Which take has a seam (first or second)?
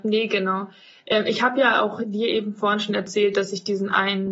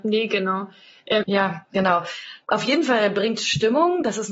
second